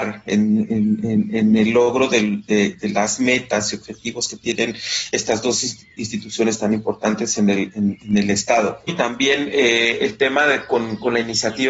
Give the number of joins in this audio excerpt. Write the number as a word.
one